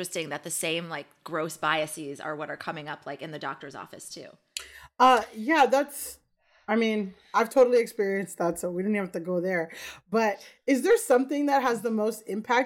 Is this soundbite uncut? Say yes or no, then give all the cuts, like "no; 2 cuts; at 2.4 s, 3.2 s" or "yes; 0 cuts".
yes; 0 cuts